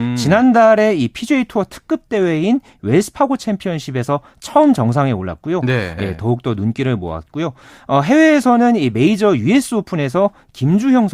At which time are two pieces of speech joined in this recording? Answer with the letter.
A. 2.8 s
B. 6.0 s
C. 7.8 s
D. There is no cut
B